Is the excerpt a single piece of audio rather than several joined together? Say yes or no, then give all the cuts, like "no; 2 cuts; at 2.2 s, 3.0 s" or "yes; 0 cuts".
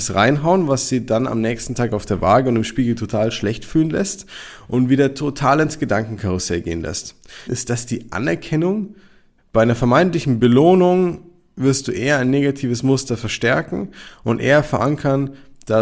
no; 2 cuts; at 7.5 s, 9.4 s